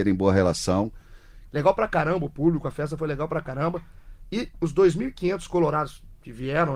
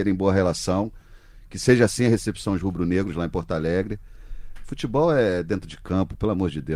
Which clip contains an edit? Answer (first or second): first